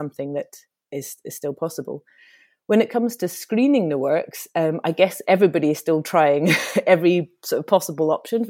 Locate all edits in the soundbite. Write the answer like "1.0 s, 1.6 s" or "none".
none